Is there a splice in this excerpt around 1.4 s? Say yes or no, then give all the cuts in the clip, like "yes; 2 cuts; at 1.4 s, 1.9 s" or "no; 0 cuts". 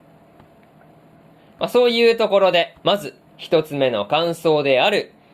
yes; 2 cuts; at 1.4 s, 2.8 s